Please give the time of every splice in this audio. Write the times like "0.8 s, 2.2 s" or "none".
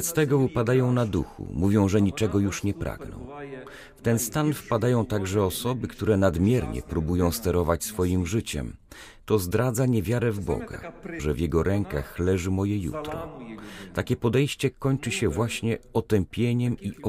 11.2 s